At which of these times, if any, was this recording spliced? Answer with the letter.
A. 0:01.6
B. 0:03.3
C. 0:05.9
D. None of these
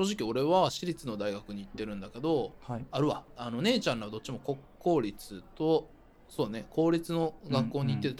B